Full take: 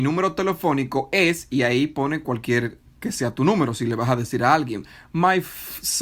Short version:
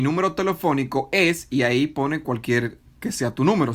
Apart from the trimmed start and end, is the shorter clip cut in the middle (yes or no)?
no